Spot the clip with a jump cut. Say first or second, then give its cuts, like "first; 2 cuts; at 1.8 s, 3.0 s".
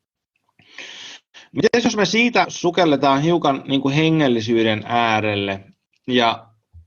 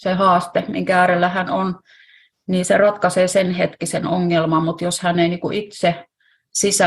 first; 1 cut; at 2.4 s